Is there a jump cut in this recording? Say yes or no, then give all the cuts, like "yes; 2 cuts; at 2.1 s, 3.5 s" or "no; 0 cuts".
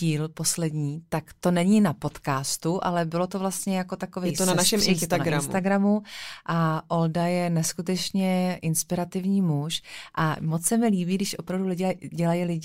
no; 0 cuts